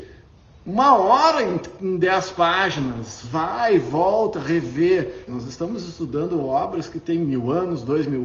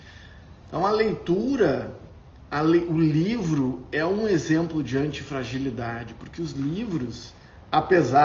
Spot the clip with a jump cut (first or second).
first